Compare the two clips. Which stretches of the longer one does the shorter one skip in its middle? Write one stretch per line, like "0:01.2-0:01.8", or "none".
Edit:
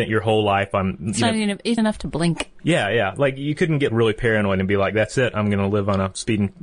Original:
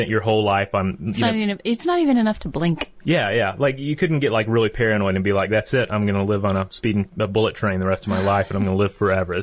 0:01.8-0:02.2
0:04.3-0:04.4